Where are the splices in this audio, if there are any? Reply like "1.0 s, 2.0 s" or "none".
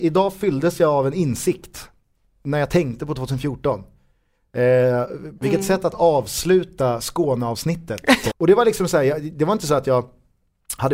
5.4 s, 8.3 s